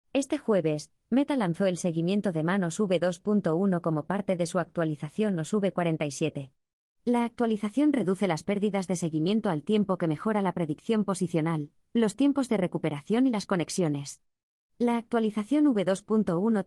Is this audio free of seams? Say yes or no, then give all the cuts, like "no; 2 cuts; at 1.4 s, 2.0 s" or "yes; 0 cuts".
no; 1 cut; at 14.7 s